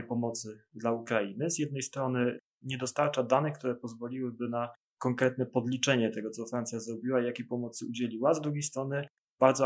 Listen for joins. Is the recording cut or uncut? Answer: uncut